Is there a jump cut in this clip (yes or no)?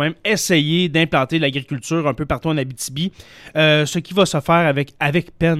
no